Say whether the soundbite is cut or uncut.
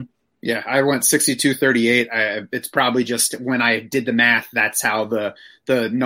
uncut